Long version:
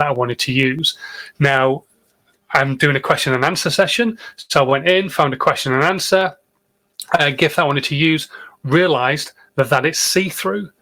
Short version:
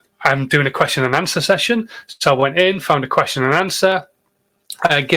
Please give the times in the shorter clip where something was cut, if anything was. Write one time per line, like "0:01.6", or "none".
none